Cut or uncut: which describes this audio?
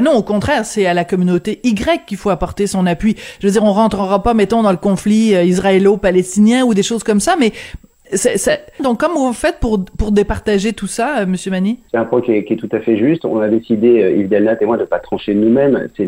cut